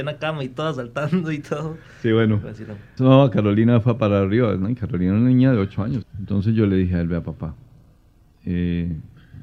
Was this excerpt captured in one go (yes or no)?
no